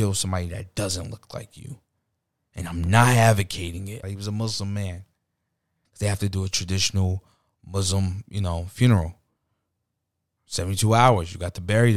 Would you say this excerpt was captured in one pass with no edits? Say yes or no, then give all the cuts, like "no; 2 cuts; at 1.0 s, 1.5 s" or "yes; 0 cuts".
no; 2 cuts; at 4.0 s, 5.8 s